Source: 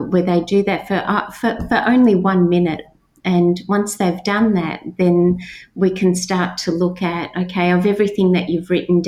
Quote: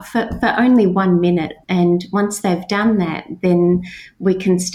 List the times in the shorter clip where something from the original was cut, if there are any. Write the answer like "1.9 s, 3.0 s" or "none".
1.6 s

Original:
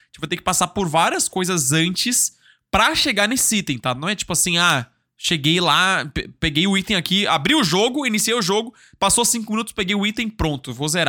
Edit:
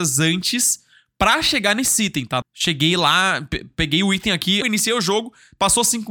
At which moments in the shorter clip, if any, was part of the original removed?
2.4 s, 4.6 s

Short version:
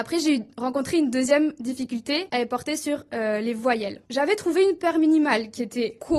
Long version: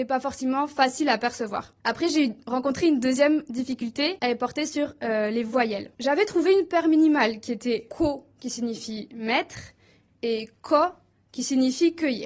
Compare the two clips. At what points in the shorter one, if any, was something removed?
none

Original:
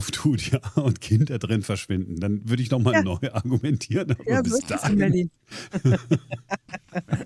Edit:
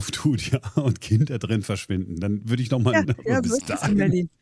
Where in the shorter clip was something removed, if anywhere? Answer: 3.0 s

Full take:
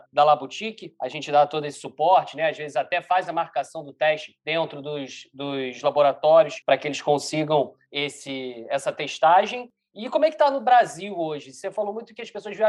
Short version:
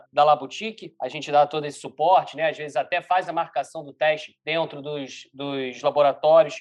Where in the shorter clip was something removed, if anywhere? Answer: none

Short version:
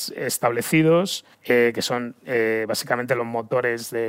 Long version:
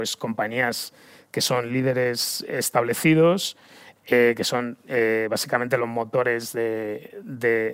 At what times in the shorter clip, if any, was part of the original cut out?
1.3 s

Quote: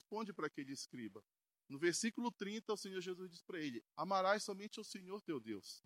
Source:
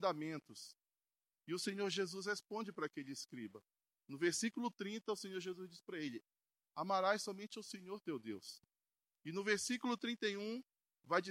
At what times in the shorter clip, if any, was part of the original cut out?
3.9 s

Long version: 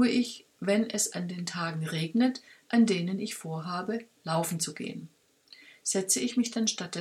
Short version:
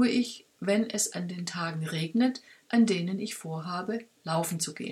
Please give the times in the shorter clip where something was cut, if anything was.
none

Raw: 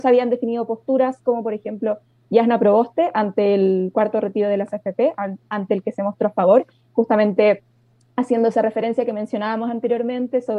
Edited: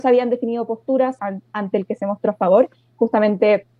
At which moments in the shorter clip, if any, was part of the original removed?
1.2 s

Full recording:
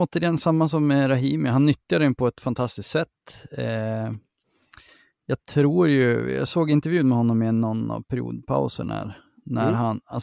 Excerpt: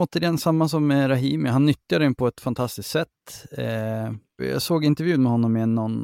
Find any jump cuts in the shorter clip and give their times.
4.4 s

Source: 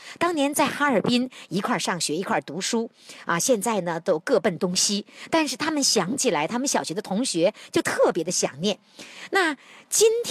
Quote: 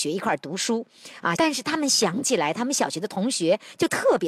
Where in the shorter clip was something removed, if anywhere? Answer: 1.4 s

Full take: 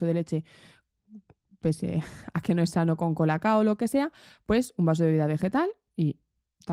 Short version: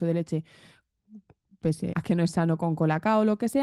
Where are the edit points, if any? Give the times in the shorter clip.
1.9 s

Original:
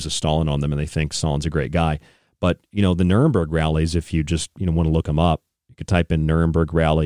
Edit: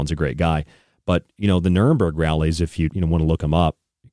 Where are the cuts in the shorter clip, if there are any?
2.9 s

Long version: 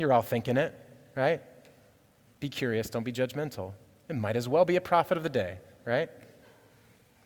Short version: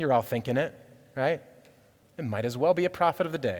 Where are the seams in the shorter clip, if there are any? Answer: 2.0 s

